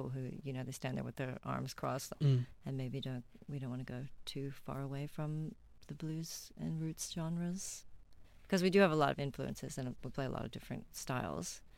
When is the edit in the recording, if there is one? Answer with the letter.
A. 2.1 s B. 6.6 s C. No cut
A